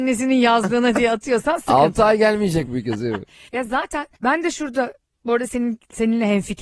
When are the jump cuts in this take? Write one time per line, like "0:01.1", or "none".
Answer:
0:02.6
0:04.2